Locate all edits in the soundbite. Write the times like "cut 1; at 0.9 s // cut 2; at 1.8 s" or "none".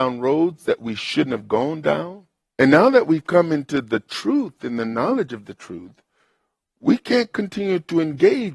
cut 1; at 2.5 s

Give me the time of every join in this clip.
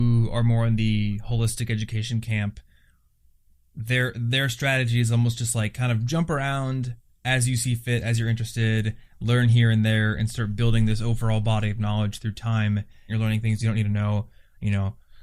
cut 1; at 13.1 s

